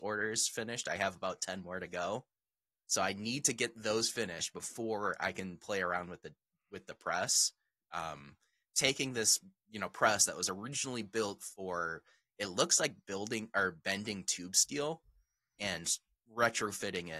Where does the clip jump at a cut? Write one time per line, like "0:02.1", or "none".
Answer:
0:07.8
0:13.0